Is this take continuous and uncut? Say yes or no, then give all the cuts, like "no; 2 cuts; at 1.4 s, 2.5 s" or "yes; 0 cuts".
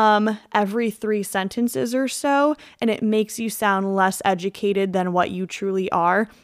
yes; 0 cuts